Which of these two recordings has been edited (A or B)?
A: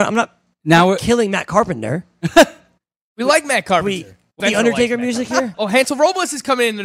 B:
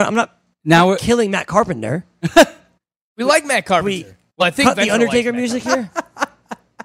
A